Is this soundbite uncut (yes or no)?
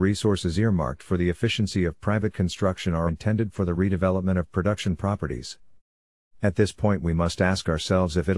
no